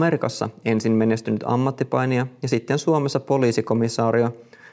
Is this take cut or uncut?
uncut